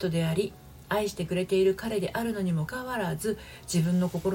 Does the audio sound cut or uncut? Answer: cut